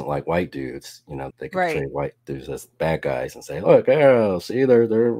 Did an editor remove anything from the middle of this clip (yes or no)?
yes